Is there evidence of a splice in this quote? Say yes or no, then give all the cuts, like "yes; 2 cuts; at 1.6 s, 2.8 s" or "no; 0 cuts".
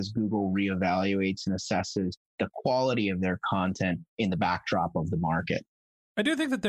no; 0 cuts